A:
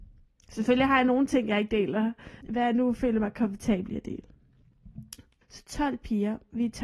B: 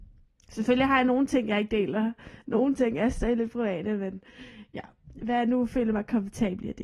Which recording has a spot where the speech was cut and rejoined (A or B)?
A